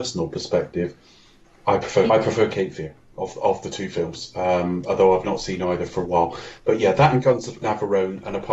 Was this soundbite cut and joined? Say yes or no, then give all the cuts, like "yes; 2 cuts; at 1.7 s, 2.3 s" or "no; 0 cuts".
yes; 1 cut; at 2.1 s